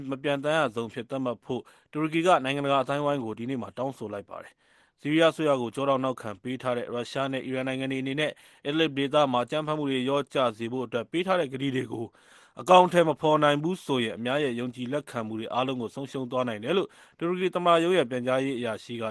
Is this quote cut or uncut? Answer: uncut